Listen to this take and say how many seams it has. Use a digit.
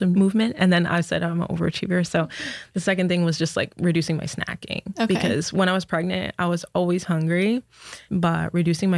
1